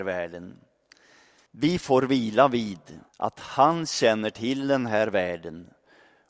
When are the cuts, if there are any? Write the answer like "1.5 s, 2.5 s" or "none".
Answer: 1.5 s, 3.1 s